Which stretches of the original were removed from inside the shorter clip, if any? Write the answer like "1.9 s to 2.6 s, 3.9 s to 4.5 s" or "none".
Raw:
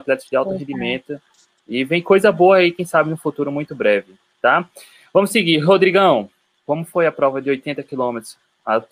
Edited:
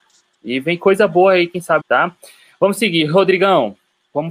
3.0 s to 4.3 s